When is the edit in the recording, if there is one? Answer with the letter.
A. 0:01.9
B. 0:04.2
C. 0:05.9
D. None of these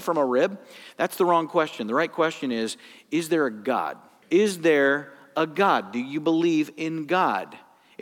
B